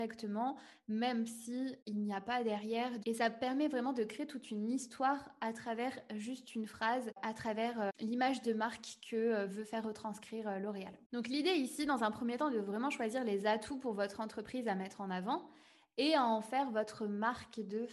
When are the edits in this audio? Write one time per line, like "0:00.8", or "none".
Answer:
0:03.0